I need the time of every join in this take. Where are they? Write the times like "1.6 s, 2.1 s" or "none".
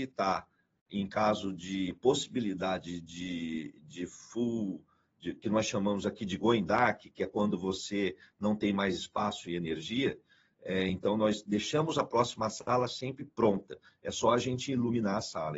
none

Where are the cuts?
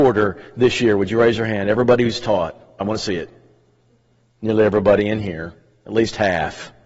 2.8 s

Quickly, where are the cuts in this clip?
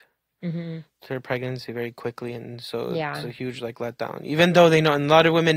none

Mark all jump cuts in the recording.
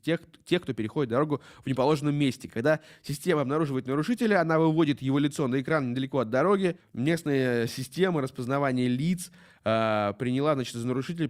none

